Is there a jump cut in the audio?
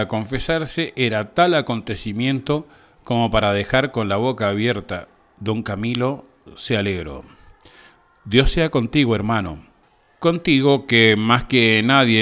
no; 0 cuts

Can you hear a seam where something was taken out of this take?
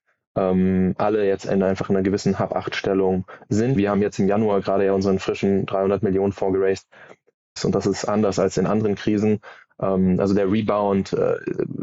yes; 2 cuts; at 3.8 s, 7.6 s

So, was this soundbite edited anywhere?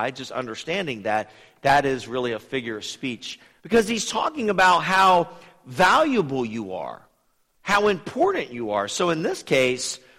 yes; 1 cut; at 3.6 s

